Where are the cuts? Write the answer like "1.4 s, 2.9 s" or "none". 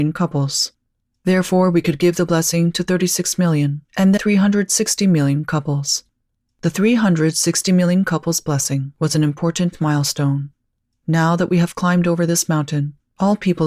4.2 s